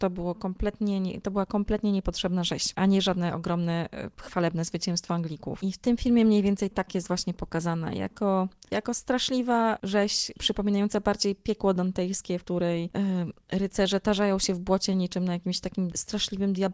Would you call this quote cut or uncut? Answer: uncut